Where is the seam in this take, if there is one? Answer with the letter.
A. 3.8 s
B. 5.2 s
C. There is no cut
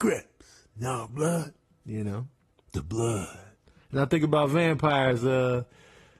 C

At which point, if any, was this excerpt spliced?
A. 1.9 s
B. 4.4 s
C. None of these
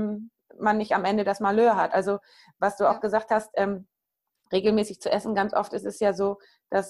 C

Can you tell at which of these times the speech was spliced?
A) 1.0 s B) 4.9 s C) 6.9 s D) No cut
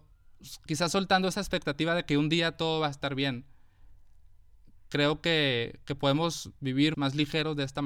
C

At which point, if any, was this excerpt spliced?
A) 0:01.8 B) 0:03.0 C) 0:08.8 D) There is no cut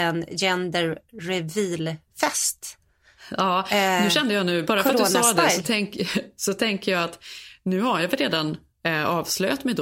D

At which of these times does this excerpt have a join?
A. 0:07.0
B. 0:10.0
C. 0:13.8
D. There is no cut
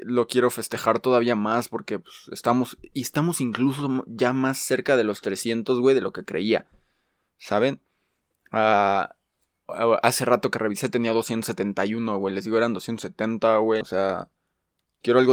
C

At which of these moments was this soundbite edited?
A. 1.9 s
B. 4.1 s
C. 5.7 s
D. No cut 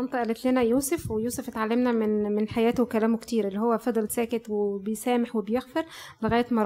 B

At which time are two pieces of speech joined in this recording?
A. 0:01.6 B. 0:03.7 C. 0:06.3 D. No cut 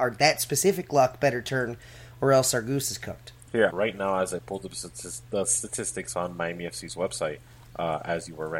B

